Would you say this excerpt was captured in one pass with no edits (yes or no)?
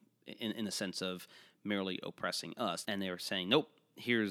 no